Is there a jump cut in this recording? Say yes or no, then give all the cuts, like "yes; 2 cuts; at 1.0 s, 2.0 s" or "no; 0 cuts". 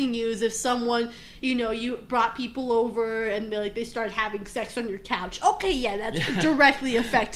no; 0 cuts